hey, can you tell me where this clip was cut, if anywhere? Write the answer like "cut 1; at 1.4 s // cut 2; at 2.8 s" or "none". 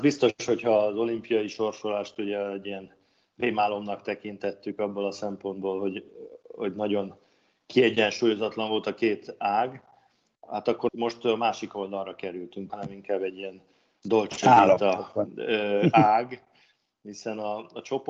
cut 1; at 10.9 s // cut 2; at 12.7 s